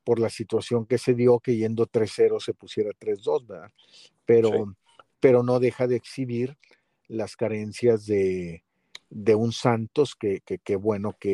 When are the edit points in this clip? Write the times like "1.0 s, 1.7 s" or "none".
none